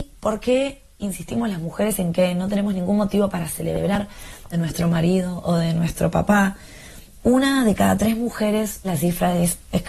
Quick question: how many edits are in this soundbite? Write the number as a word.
three